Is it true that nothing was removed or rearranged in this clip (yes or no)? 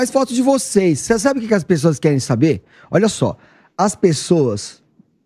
yes